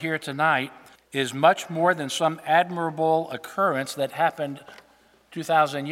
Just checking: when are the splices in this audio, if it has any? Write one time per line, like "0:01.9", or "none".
0:00.9